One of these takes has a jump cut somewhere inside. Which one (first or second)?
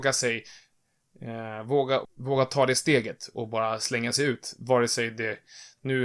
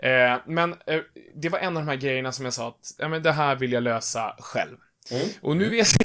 first